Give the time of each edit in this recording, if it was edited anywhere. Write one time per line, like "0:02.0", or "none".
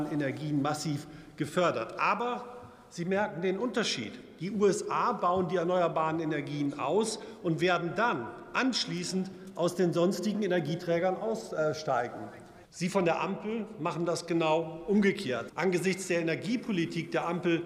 0:12.7
0:15.5